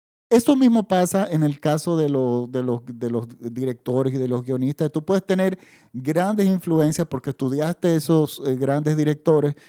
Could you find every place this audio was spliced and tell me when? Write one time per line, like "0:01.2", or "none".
none